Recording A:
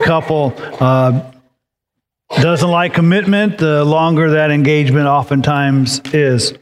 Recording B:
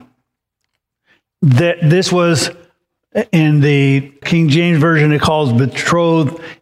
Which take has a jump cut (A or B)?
B